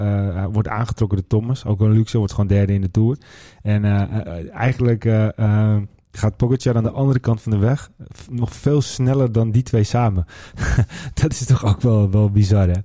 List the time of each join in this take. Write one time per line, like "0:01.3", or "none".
none